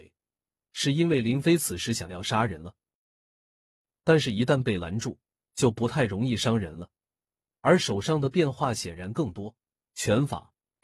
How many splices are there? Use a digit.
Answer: 1